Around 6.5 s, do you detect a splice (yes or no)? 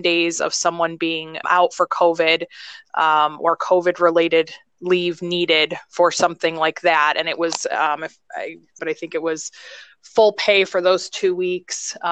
no